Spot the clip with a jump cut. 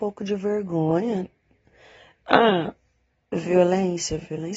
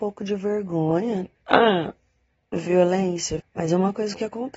second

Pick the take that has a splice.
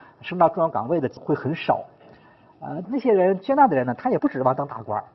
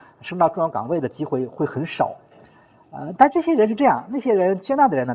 first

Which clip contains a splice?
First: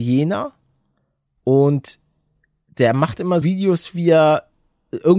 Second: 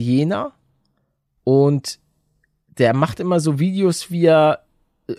first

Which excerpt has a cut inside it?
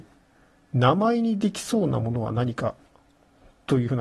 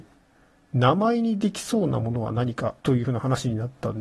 second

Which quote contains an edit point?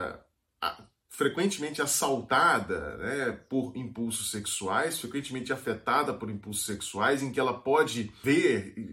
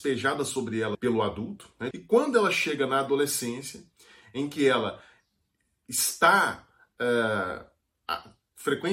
second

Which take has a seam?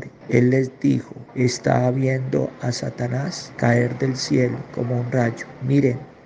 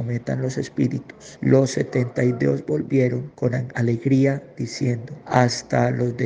second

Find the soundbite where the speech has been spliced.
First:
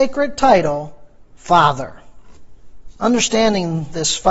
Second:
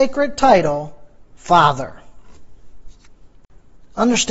first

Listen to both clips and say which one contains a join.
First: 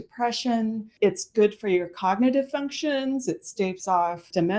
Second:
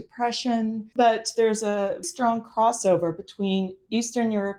second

